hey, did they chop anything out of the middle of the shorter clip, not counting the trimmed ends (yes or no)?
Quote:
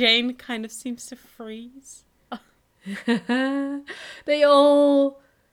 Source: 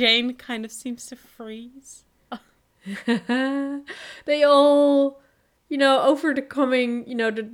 no